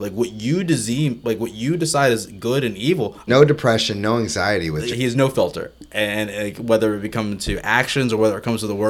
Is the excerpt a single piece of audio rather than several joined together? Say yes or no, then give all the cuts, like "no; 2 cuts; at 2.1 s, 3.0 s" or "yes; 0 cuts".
no; 2 cuts; at 3.3 s, 4.9 s